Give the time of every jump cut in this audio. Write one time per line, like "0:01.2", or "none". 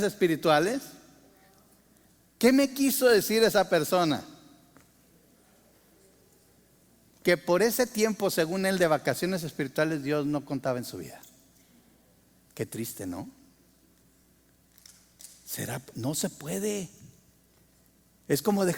none